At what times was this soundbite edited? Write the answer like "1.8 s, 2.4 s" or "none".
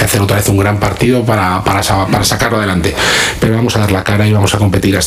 none